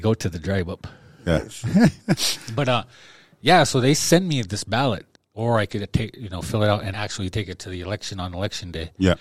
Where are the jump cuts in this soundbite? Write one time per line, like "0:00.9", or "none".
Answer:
0:05.1
0:06.9